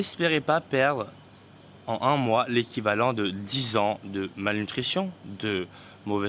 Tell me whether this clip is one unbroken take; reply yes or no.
yes